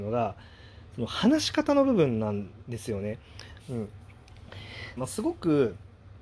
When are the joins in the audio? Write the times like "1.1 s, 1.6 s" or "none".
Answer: 3.6 s, 5.0 s